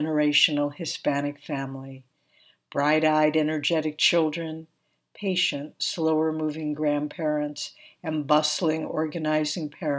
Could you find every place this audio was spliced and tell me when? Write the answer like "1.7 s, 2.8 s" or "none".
none